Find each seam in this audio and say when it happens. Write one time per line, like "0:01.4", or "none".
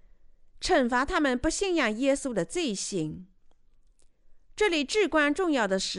none